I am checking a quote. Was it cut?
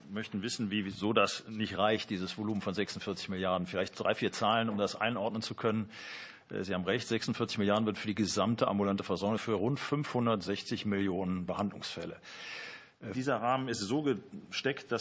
yes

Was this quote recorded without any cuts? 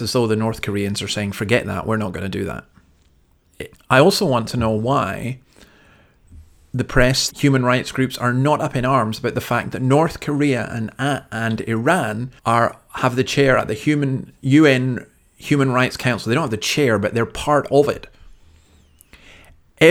no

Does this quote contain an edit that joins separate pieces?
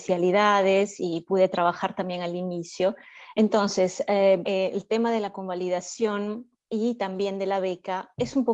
yes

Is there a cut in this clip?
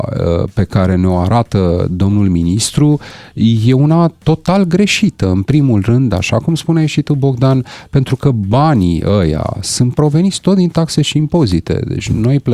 no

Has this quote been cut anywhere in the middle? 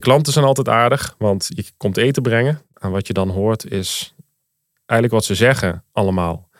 yes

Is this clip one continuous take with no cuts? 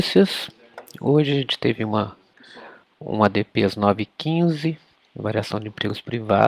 yes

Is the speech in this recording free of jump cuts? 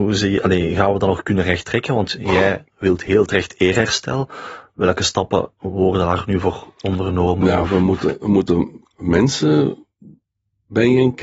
yes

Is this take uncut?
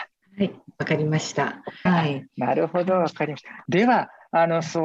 no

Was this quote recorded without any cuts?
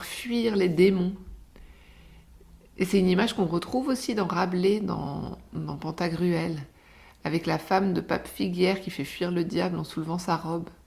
yes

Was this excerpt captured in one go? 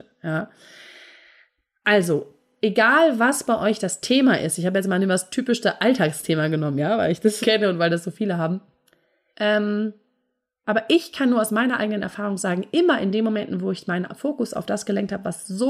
no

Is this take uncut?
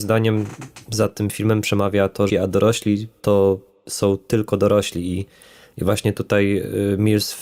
no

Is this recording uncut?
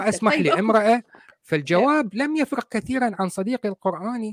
no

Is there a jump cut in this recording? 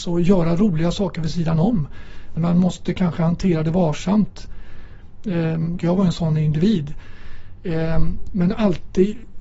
yes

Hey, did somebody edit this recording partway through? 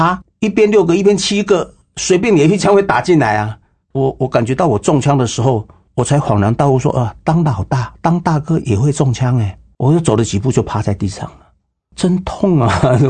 no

